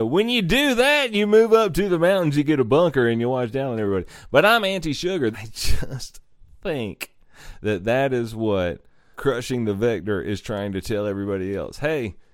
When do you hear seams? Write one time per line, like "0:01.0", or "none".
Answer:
0:05.3
0:09.1